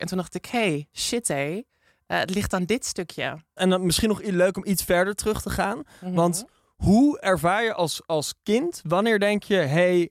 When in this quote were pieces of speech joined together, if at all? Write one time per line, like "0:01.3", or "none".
0:03.6